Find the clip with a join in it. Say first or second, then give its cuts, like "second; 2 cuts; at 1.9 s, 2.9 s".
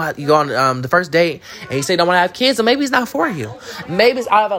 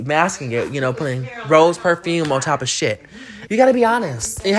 second; 1 cut; at 3.5 s